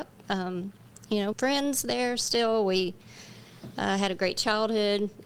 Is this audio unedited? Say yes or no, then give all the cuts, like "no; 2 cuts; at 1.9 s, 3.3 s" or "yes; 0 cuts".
no; 1 cut; at 1.3 s